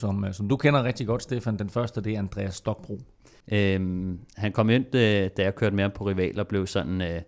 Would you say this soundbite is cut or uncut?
cut